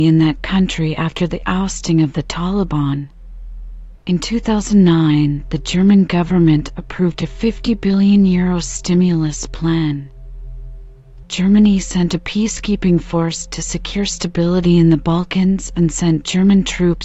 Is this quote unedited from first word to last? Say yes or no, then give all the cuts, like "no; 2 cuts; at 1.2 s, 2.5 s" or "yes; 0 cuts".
no; 2 cuts; at 4.0 s, 11.2 s